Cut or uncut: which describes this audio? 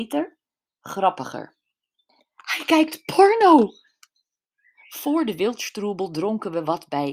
cut